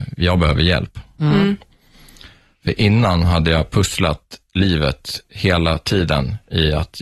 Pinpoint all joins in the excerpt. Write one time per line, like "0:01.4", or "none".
none